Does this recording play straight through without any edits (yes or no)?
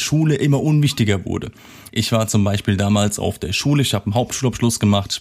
no